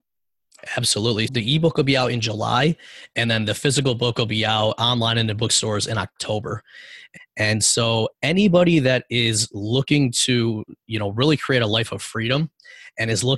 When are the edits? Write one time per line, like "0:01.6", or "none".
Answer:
0:01.3
0:07.2